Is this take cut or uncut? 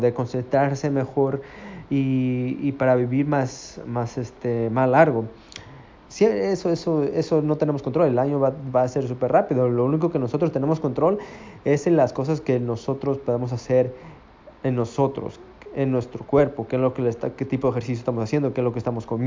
cut